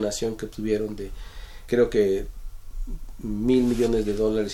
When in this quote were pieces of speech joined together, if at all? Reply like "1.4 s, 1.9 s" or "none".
1.7 s